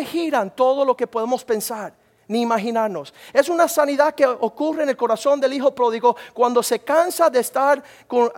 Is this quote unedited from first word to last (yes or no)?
yes